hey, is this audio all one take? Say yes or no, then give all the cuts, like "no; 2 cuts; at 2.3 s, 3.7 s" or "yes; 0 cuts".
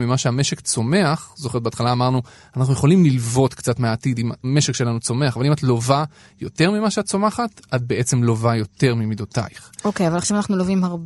yes; 0 cuts